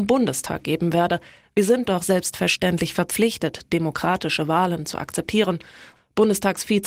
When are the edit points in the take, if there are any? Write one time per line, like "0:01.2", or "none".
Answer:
0:01.4
0:06.0